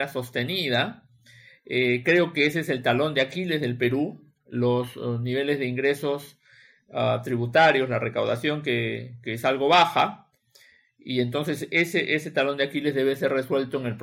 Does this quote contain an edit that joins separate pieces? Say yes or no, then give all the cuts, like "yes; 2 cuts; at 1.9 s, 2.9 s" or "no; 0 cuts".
no; 0 cuts